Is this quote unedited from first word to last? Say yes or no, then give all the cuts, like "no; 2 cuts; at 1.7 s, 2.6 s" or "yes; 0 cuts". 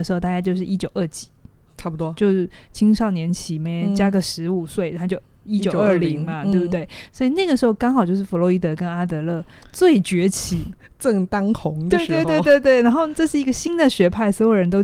yes; 0 cuts